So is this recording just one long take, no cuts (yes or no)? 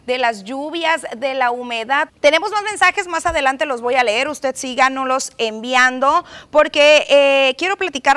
no